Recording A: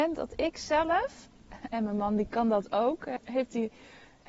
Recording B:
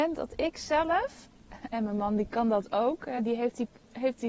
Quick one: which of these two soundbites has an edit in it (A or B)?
A